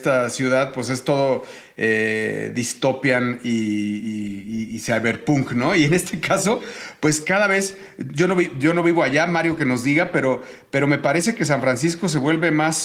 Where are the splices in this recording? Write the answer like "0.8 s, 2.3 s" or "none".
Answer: none